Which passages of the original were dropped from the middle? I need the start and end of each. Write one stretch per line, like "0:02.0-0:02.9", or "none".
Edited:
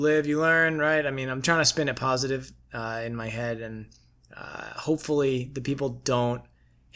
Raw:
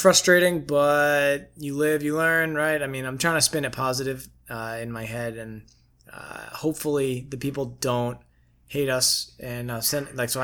none